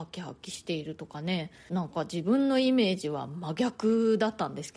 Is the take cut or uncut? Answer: cut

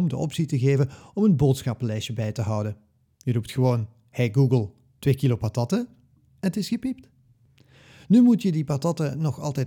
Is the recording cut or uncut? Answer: uncut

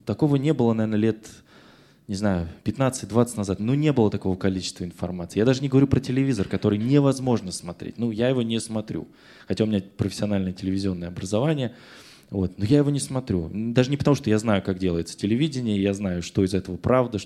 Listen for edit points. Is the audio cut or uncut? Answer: uncut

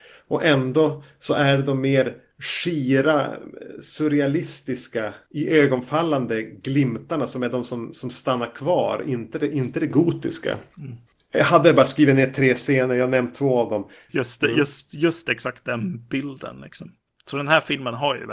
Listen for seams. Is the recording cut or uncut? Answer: cut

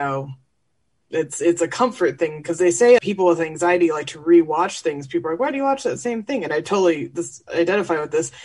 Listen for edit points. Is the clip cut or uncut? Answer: cut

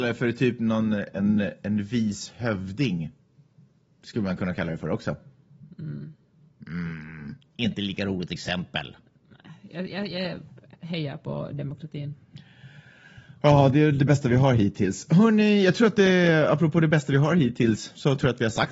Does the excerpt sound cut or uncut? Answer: uncut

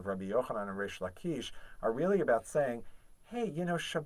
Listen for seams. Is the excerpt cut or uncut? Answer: uncut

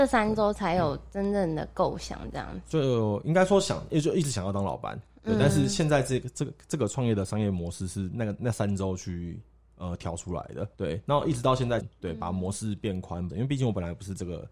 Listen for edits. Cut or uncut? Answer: cut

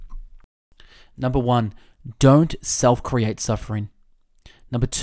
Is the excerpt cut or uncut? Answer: uncut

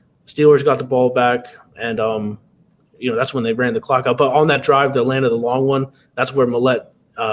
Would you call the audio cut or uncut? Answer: uncut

